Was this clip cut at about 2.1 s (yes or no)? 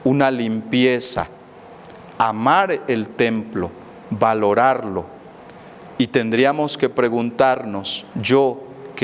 no